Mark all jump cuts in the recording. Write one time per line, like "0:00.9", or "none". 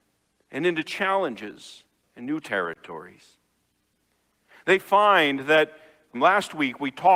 0:06.1